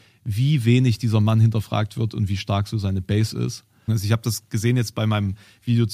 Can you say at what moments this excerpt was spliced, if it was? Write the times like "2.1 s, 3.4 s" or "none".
3.9 s